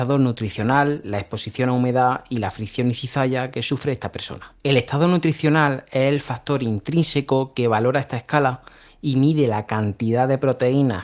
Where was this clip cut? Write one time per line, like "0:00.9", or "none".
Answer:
0:04.6